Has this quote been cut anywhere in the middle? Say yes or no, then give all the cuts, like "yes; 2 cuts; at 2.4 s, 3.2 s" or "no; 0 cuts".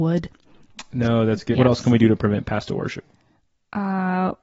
yes; 1 cut; at 1.5 s